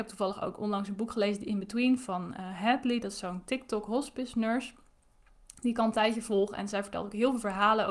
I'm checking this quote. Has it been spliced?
no; 0 cuts

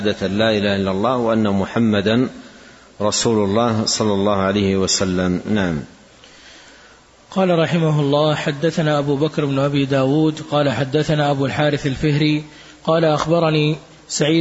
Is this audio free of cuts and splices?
yes; 0 cuts

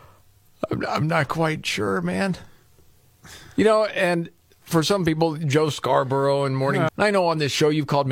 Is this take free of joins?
no; 1 cut; at 6.9 s

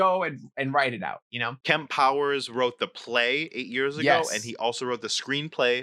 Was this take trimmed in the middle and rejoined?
no; 0 cuts

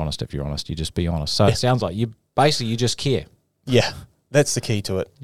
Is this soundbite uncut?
yes; 0 cuts

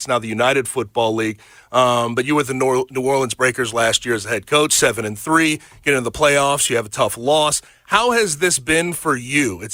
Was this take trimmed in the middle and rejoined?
no; 0 cuts

